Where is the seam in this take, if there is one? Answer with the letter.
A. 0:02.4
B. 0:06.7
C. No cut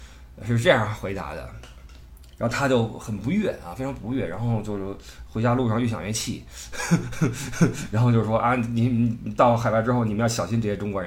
C